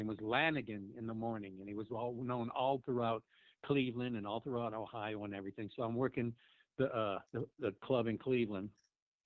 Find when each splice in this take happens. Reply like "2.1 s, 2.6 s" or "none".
7.3 s